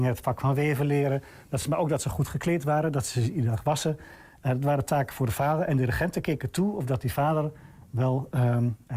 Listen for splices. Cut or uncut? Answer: uncut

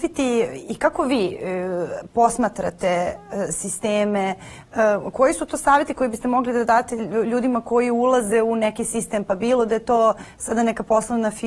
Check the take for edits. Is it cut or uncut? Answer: uncut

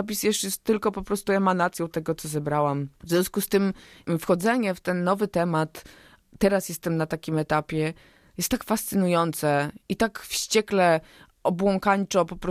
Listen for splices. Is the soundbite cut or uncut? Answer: uncut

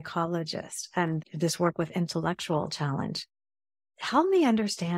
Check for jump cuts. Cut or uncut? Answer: cut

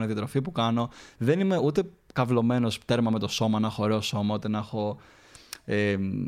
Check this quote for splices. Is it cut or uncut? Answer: uncut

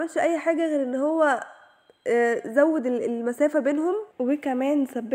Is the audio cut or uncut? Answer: cut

